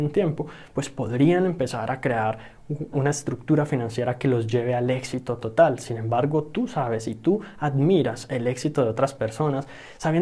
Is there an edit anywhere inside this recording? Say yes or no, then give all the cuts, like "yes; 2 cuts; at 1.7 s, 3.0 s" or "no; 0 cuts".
yes; 1 cut; at 2.9 s